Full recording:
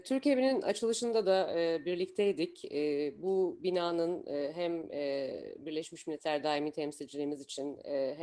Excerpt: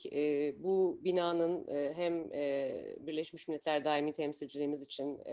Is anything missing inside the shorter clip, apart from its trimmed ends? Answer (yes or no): no